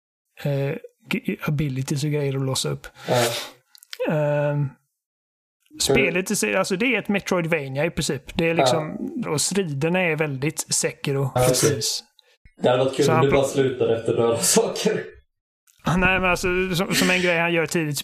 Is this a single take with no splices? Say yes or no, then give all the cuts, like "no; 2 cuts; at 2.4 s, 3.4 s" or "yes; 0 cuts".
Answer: no; 2 cuts; at 9.2 s, 11.4 s